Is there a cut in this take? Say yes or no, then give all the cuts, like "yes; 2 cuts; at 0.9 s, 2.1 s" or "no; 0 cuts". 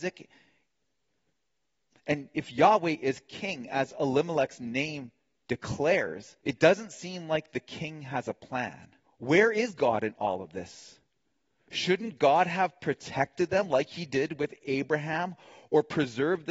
yes; 2 cuts; at 6.4 s, 9.0 s